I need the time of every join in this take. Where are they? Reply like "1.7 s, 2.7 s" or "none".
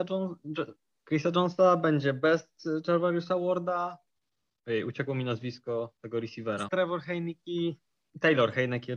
4.5 s, 6.7 s